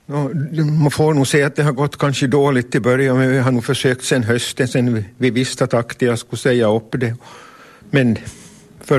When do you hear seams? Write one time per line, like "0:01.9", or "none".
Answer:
0:07.8